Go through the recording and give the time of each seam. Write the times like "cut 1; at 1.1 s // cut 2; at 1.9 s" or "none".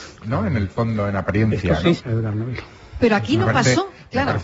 cut 1; at 2.0 s // cut 2; at 3.0 s